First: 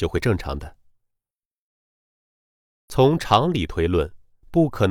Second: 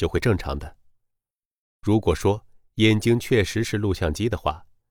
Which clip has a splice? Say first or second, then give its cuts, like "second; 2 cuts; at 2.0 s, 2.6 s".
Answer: second; 1 cut; at 1.6 s